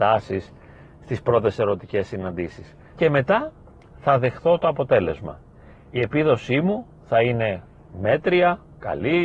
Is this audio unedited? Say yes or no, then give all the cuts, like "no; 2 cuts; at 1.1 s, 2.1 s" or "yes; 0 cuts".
no; 1 cut; at 2.9 s